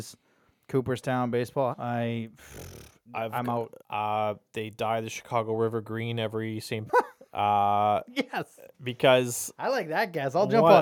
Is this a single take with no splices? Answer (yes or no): no